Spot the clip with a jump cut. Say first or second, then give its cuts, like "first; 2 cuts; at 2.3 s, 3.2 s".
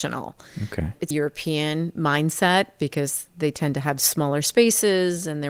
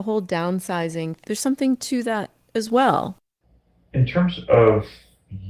first; 1 cut; at 1.1 s